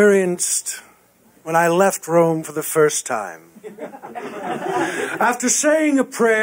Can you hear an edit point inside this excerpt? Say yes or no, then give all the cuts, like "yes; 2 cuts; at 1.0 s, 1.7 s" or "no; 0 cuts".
no; 0 cuts